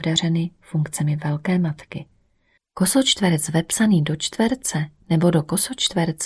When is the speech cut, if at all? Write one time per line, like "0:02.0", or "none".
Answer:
0:02.6